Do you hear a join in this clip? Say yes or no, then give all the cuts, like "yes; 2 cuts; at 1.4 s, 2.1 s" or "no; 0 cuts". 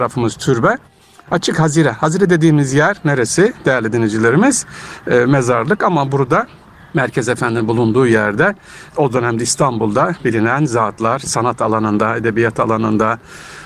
no; 0 cuts